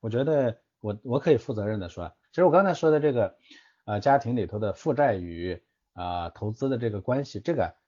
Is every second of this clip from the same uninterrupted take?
no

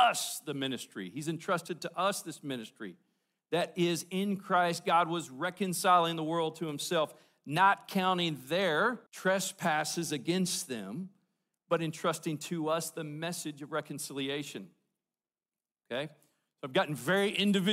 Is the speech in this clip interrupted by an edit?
yes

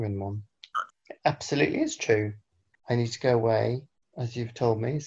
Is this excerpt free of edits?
no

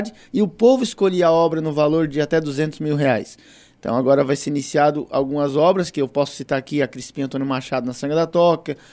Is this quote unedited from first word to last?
yes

